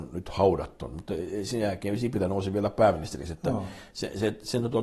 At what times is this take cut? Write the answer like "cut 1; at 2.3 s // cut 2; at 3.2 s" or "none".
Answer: none